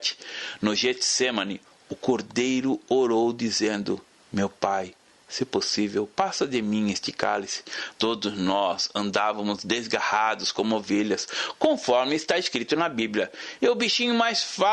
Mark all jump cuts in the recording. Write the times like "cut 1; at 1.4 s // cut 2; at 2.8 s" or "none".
cut 1; at 7.9 s